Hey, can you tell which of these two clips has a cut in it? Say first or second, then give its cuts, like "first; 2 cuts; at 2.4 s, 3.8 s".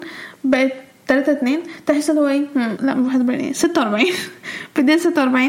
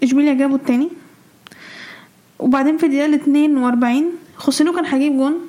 first; 1 cut; at 2.8 s